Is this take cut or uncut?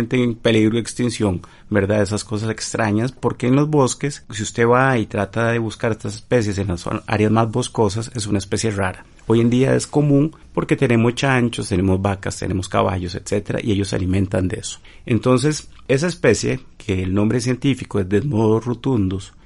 uncut